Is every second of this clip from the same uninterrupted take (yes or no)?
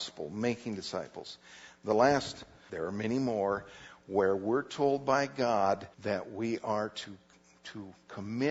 no